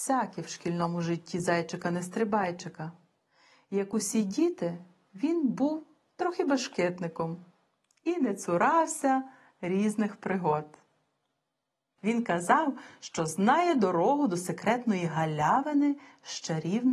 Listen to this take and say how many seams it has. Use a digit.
1